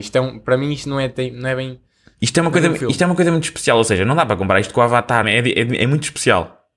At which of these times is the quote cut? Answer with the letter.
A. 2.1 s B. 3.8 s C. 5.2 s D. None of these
C